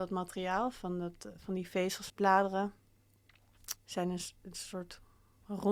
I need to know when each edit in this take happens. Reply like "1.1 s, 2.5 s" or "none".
2.1 s, 3.8 s